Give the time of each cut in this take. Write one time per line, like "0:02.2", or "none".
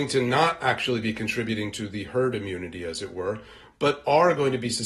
none